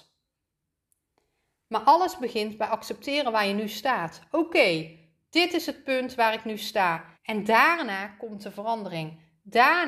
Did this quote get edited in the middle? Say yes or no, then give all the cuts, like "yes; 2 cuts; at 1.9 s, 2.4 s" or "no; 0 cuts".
yes; 1 cut; at 7.1 s